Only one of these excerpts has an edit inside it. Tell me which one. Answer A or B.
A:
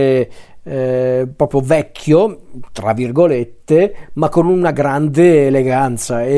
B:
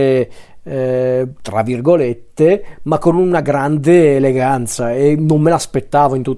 B